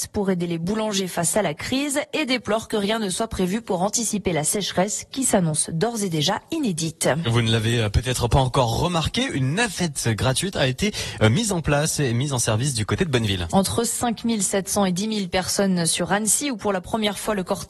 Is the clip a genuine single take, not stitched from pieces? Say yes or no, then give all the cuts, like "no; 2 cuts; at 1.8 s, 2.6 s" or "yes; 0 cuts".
no; 1 cut; at 13.5 s